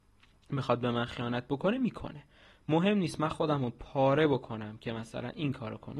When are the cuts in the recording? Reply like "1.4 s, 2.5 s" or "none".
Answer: none